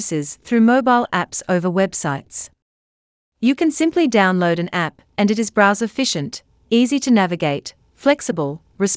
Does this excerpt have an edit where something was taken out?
no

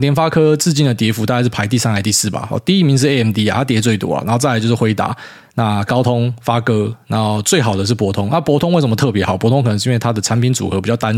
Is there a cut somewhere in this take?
no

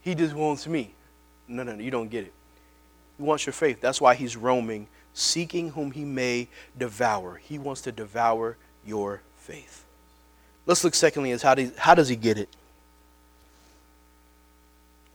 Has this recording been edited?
yes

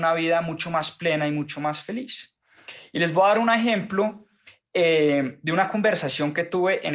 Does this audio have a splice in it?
no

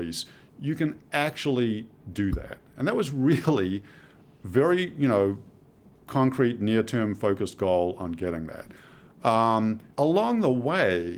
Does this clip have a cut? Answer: yes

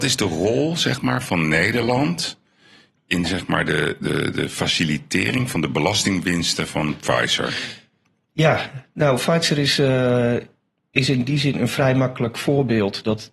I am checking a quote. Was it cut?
no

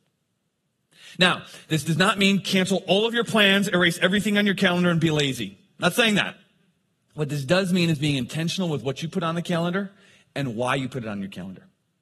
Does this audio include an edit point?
no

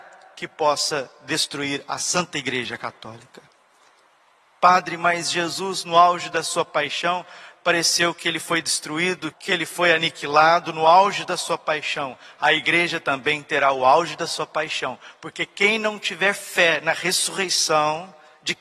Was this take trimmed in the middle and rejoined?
yes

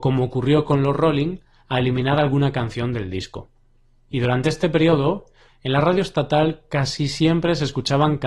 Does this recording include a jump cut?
yes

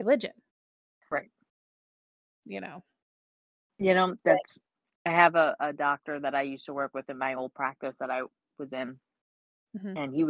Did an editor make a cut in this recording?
no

